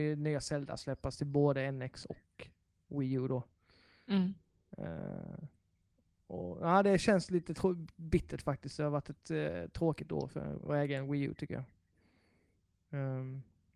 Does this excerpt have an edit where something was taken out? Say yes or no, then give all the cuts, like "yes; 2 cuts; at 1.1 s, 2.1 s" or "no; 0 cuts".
yes; 1 cut; at 10.6 s